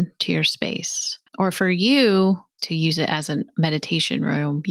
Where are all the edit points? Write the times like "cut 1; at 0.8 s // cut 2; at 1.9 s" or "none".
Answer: cut 1; at 1.3 s // cut 2; at 2.6 s